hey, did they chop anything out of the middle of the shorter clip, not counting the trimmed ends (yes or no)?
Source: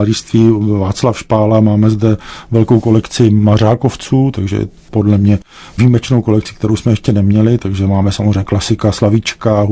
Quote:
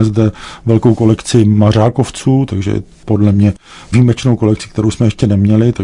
no